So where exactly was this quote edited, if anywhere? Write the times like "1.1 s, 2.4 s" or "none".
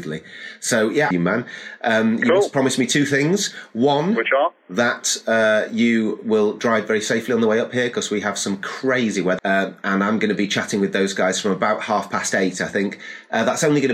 1.1 s, 9.4 s